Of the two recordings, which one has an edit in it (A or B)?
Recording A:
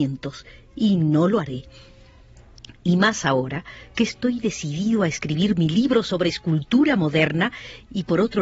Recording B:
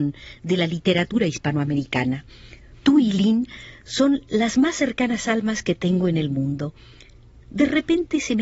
B